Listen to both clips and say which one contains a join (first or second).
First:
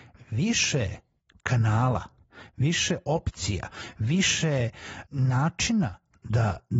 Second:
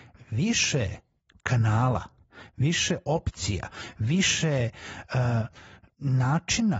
first